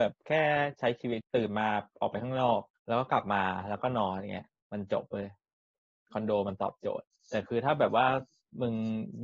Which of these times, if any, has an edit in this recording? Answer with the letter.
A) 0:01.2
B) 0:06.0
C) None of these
A